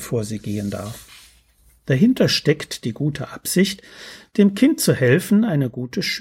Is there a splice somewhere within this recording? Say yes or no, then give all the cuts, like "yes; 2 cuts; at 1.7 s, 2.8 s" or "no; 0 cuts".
no; 0 cuts